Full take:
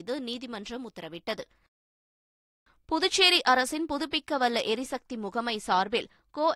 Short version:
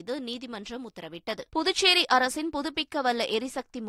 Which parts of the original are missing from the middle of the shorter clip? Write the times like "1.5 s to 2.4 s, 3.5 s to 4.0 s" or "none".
1.5 s to 2.8 s